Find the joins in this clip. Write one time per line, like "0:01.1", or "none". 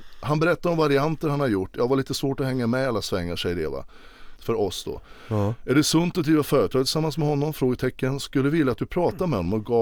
0:04.4